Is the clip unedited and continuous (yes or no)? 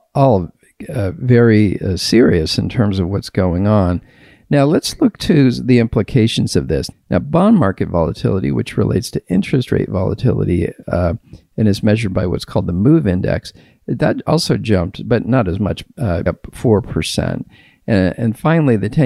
no